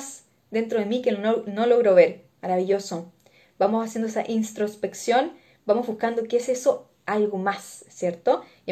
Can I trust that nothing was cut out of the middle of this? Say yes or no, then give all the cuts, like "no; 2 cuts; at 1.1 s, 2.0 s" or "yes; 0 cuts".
yes; 0 cuts